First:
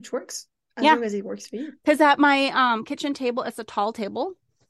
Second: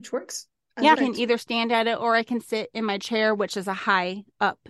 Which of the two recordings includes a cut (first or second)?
second